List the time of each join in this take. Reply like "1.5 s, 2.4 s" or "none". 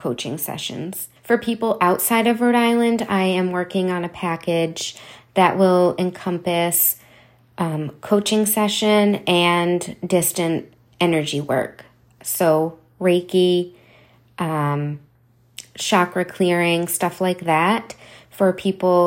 1.2 s